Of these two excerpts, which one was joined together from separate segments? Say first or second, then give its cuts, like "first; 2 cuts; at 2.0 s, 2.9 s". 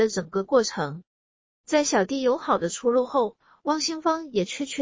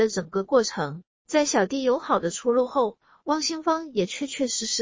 second; 1 cut; at 1.1 s